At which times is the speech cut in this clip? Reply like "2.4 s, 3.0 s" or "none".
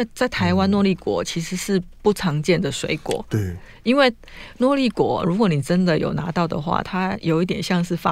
6.8 s